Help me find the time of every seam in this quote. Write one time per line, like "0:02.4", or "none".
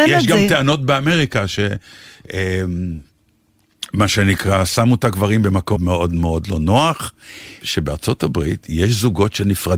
0:05.8
0:07.6

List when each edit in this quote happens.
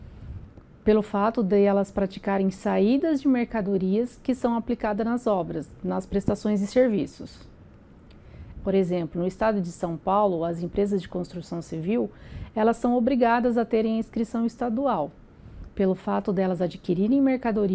0:08.5

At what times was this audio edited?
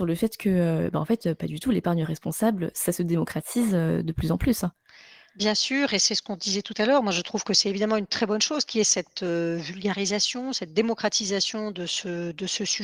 none

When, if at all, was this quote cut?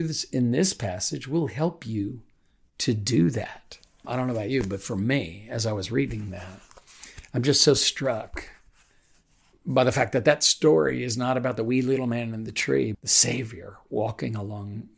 0:04.0
0:12.9

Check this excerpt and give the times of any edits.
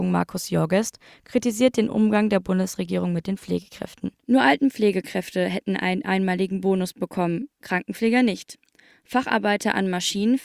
none

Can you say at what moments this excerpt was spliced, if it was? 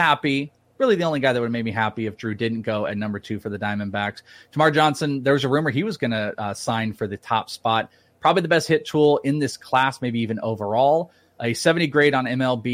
none

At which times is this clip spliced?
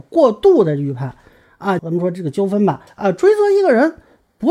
0:01.8
0:02.9

